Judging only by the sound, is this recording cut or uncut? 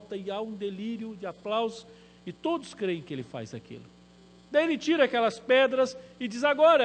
uncut